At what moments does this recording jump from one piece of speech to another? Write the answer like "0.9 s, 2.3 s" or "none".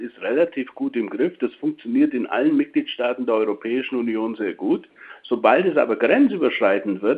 none